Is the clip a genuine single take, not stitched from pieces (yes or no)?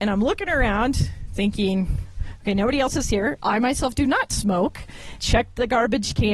no